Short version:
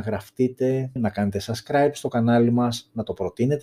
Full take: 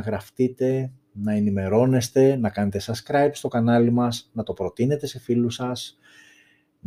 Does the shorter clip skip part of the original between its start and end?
yes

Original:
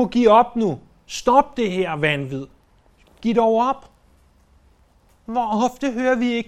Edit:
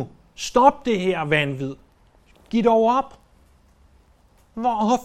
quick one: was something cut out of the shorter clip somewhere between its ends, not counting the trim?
no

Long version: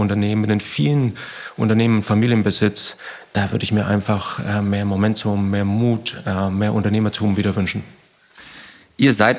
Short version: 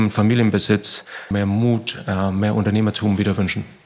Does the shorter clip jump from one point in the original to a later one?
yes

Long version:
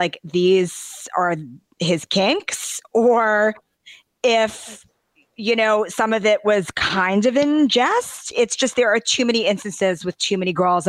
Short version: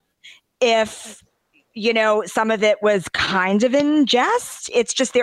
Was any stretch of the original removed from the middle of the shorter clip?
no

